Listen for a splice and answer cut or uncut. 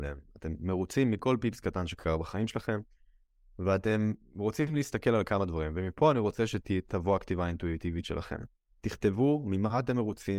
uncut